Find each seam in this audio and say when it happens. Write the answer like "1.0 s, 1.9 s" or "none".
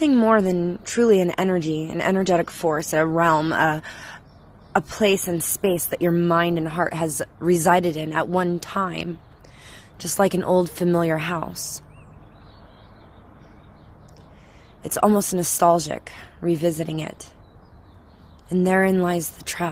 none

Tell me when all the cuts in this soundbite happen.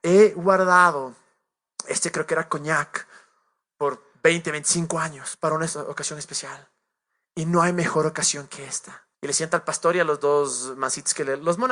9.1 s

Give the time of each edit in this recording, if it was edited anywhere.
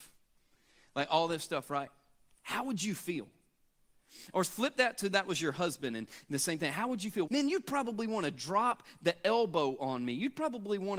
7.3 s

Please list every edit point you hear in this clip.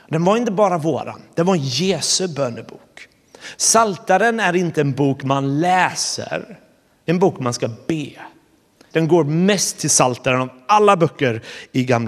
3.5 s, 8.9 s

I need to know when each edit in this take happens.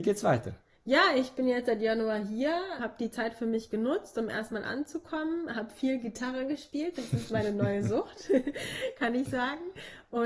2.8 s

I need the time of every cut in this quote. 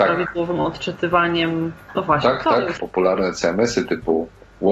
2.8 s

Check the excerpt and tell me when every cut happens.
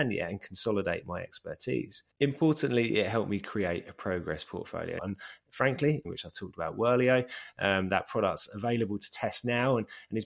2.1 s, 5.0 s, 6.0 s

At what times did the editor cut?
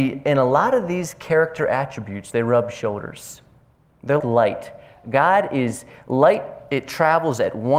4.2 s

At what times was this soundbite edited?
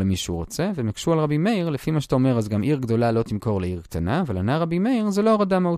none

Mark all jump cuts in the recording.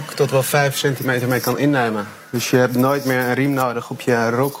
none

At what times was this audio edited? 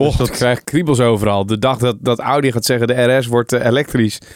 none

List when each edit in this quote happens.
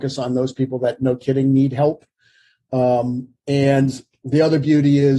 none

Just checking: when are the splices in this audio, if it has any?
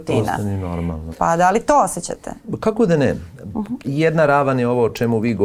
1.1 s, 3.8 s

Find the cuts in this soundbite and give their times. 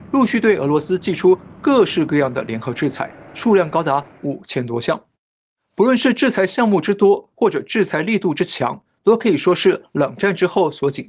none

